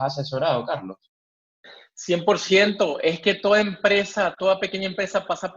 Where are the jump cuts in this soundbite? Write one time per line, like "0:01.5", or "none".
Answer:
none